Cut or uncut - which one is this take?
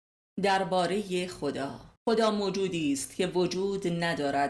cut